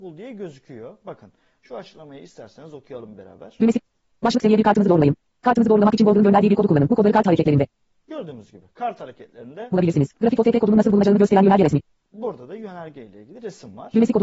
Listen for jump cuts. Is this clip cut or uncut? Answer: cut